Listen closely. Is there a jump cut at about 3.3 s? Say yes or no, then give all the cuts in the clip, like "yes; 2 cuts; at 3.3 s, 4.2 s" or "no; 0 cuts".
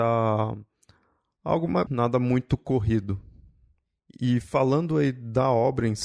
no; 1 cut; at 1.9 s